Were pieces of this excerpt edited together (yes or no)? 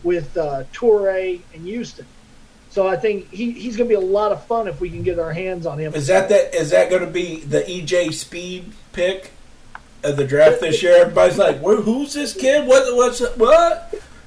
yes